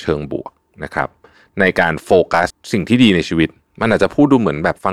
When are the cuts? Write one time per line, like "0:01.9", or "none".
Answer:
0:02.5